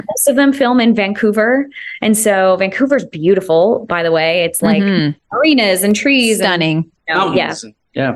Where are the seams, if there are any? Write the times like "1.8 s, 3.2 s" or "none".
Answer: none

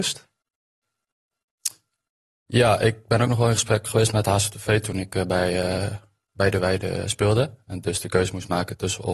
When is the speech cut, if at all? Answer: none

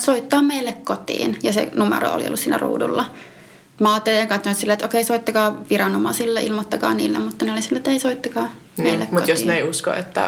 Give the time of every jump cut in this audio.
none

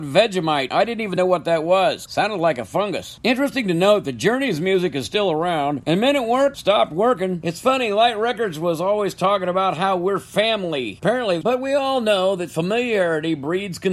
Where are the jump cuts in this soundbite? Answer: 11.4 s

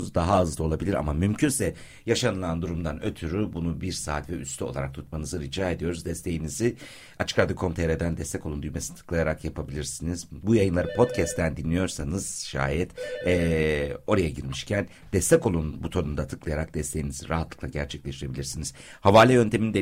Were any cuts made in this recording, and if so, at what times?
none

